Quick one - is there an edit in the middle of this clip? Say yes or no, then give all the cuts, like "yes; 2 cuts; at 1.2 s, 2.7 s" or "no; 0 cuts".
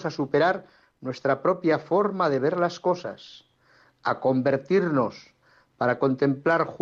no; 0 cuts